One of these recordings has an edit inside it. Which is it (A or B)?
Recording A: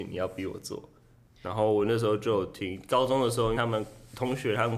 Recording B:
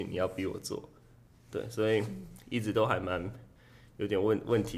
A